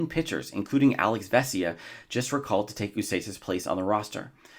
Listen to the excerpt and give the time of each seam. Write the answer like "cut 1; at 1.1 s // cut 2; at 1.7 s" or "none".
none